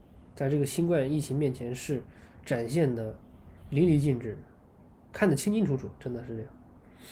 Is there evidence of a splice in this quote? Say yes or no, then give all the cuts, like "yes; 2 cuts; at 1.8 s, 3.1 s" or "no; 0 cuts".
yes; 1 cut; at 3.6 s